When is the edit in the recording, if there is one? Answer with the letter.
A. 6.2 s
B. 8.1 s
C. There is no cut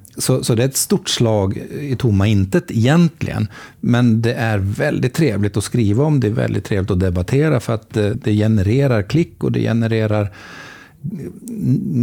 B